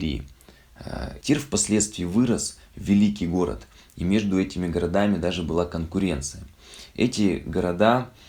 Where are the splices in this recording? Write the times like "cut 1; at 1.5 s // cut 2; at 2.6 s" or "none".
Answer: cut 1; at 1.2 s